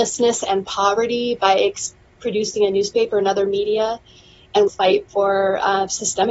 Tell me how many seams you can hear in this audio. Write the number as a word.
one